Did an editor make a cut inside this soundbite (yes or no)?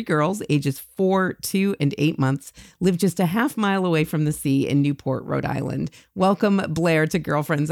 no